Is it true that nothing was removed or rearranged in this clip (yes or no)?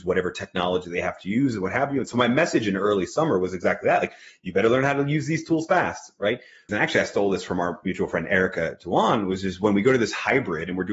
no